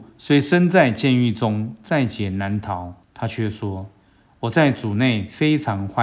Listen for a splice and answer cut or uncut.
cut